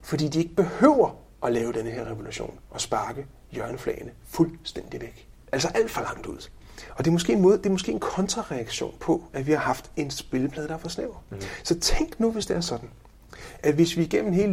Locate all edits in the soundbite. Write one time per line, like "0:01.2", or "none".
0:05.4